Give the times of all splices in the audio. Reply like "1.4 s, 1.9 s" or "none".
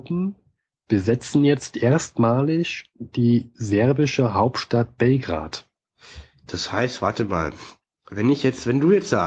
none

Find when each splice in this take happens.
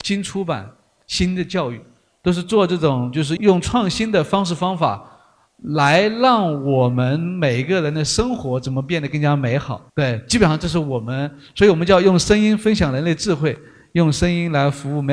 3.4 s, 9.9 s

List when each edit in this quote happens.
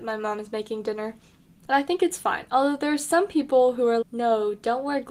1.4 s, 4.0 s

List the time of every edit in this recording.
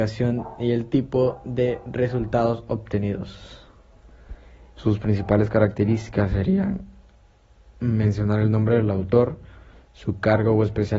4.8 s

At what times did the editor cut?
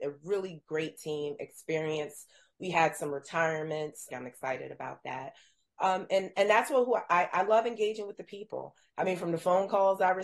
4.1 s

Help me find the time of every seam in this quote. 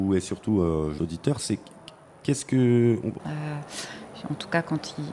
1.0 s, 3.2 s

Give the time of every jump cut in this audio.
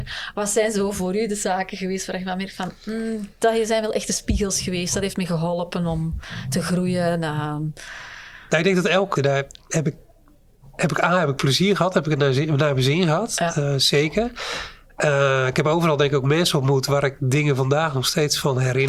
9.2 s

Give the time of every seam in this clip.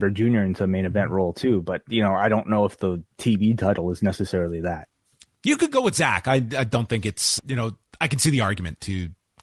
7.4 s

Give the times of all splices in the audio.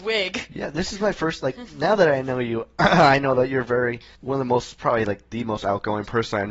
none

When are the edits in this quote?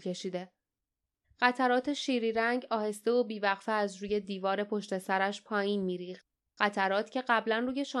1.2 s

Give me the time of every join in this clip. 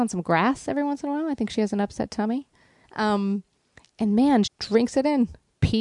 2.8 s, 4.4 s

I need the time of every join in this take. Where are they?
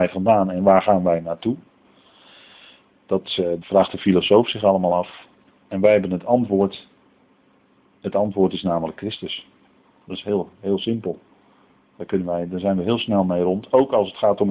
3.6 s

